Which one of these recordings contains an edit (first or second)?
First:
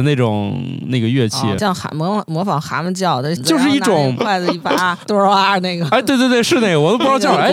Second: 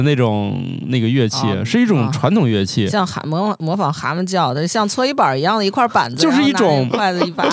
first